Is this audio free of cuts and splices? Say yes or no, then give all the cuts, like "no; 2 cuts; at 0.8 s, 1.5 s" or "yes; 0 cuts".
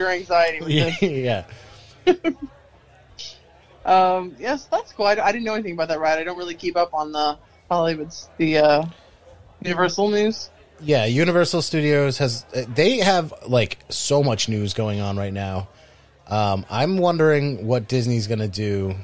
yes; 0 cuts